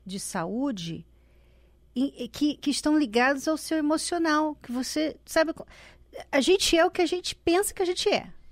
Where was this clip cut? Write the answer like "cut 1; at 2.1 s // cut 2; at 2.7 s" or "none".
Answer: none

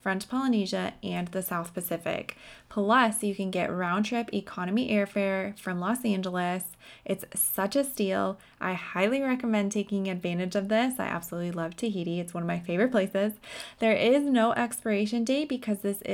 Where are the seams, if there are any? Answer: none

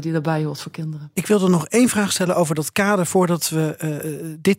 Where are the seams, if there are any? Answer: none

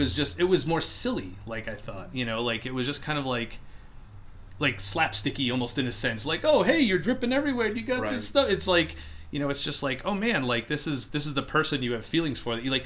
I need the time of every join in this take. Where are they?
none

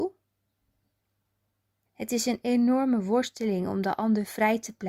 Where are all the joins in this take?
cut 1; at 1.9 s

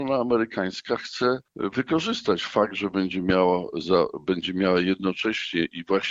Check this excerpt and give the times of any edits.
cut 1; at 1.5 s

